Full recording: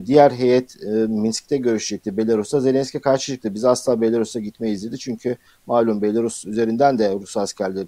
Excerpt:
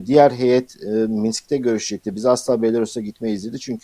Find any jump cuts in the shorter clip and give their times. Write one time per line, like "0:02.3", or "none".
0:02.1